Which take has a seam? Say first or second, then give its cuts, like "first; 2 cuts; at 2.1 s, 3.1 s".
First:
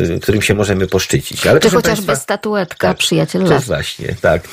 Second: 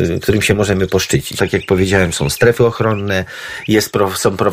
second; 1 cut; at 1.4 s